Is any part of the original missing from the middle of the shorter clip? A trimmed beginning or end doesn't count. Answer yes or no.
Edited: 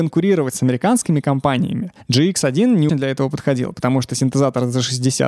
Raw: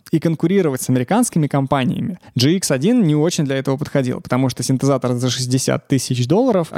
yes